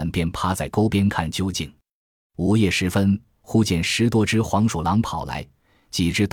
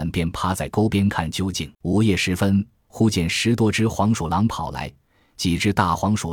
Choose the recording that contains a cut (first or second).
second